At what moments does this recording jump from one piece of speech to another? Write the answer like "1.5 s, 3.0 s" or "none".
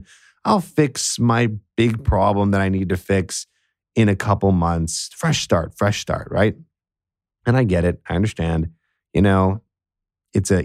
none